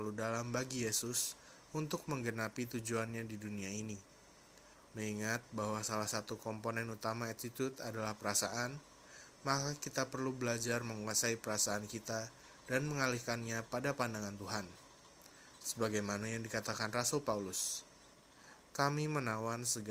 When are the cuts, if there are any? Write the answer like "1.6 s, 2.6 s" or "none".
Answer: 4.9 s